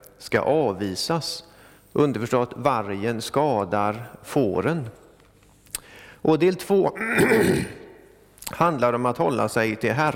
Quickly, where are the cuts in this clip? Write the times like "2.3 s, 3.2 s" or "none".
none